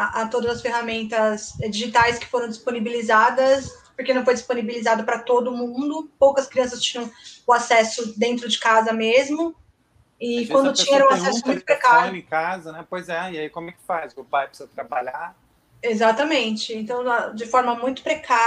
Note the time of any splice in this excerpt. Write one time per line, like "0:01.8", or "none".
none